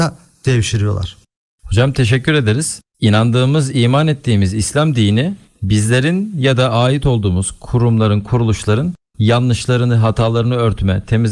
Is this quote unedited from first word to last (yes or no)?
no